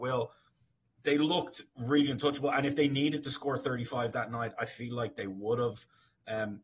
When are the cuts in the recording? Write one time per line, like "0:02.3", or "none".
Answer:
none